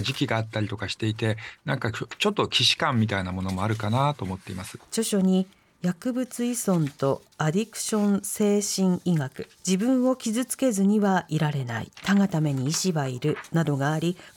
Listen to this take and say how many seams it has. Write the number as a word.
three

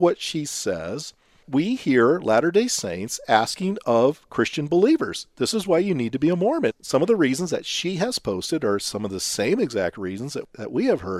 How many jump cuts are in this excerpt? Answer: zero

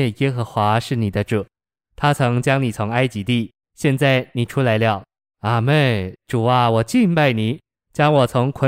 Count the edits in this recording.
one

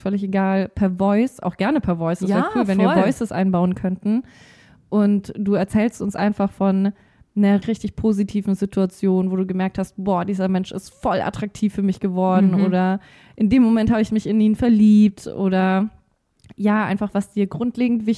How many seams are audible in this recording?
one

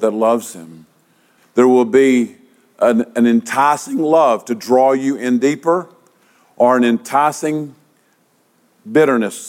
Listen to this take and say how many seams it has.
one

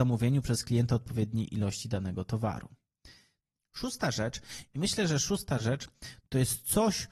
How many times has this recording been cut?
one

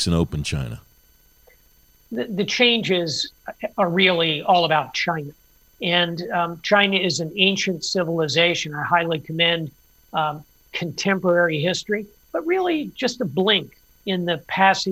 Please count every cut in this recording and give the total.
one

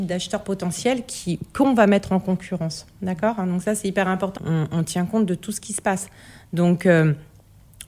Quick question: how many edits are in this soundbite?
one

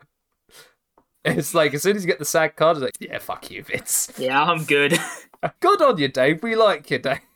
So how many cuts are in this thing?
two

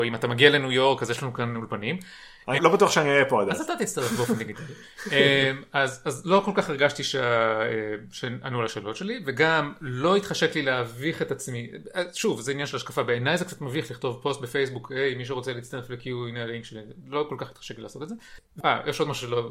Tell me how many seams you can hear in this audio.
one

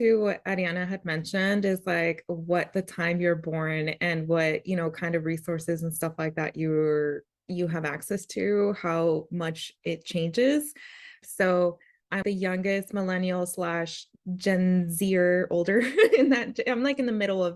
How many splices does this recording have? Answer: two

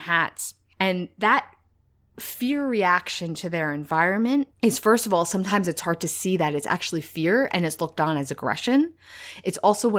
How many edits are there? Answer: one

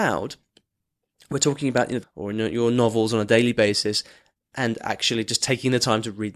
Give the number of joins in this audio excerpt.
one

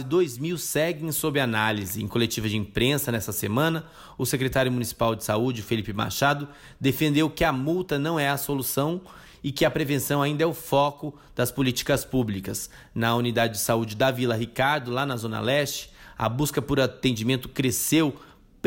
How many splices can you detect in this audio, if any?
zero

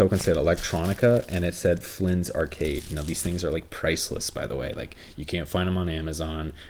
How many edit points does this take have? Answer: zero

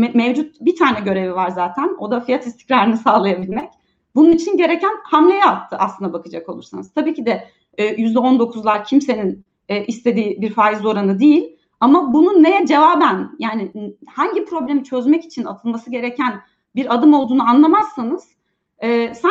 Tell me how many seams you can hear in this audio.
zero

